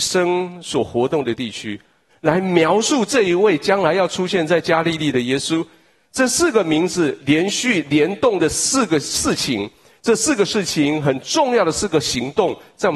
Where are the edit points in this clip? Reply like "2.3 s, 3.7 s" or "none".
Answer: 2.1 s